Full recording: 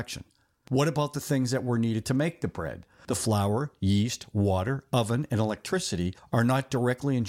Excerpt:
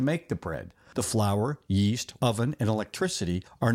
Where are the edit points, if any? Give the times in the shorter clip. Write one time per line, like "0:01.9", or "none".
0:02.2